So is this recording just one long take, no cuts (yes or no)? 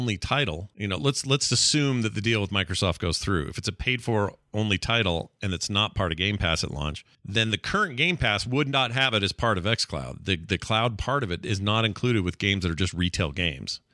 yes